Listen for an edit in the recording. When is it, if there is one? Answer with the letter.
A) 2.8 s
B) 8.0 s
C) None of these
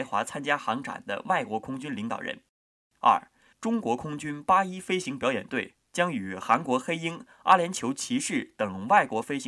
A